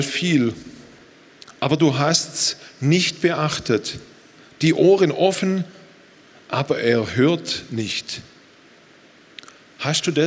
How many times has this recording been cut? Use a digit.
0